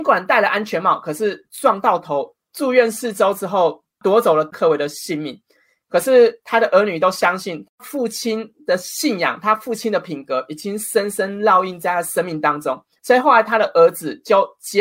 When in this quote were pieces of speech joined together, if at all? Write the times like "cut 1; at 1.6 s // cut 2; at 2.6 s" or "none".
cut 1; at 2.4 s